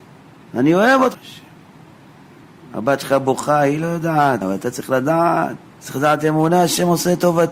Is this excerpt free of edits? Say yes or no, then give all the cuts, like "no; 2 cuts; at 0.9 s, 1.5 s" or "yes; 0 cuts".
no; 2 cuts; at 1.1 s, 4.4 s